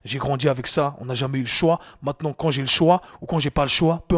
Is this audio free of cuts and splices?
yes; 0 cuts

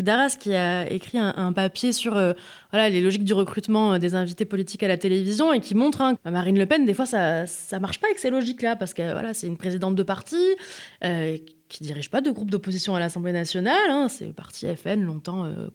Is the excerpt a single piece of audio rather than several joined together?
no; 1 cut; at 6.2 s

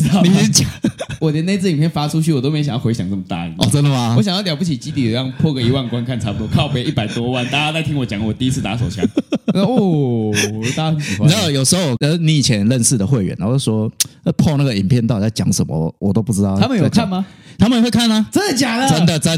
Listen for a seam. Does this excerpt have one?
no; 0 cuts

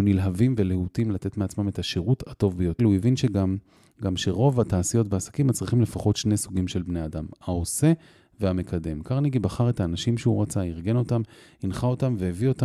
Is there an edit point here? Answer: yes; 1 cut; at 2.8 s

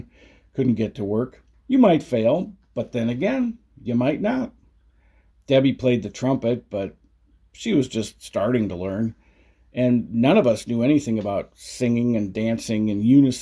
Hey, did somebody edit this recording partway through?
yes; 2 cuts; at 1.5 s, 5.3 s

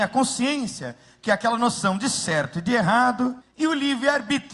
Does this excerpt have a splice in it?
yes; 1 cut; at 3.4 s

